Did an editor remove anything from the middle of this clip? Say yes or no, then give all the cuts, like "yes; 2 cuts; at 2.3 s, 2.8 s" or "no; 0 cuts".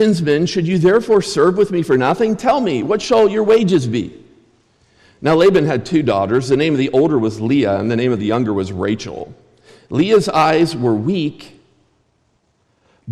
no; 0 cuts